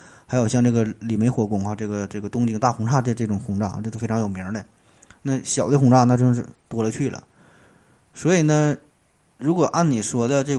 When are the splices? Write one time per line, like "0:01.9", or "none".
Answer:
none